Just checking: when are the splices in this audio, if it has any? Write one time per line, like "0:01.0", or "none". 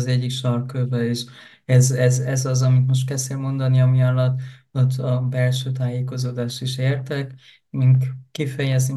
none